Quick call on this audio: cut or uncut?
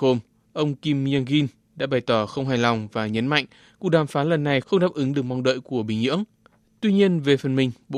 uncut